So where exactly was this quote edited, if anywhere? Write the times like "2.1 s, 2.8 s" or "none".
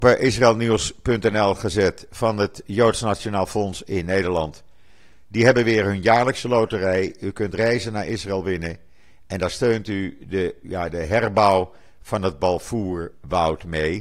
10.6 s